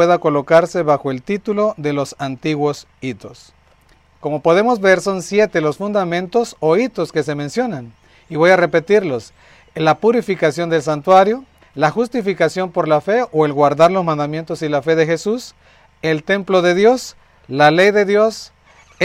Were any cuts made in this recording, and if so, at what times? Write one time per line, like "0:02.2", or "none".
0:11.6